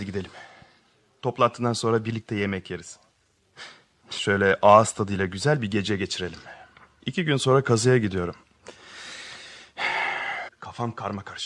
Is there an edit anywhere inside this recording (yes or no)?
yes